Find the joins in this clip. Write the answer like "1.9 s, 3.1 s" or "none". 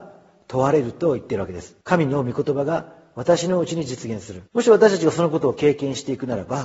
1.8 s, 4.5 s